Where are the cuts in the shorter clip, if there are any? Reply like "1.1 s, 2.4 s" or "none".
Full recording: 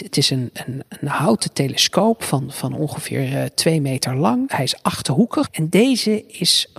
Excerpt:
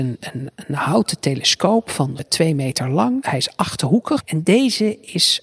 2.2 s